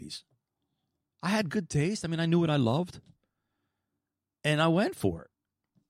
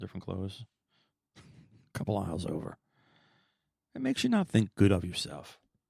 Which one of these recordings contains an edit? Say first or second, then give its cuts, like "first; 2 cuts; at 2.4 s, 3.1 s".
first; 1 cut; at 1.1 s